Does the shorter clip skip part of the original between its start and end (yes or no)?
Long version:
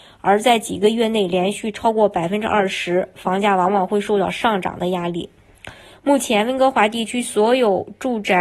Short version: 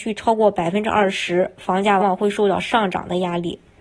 yes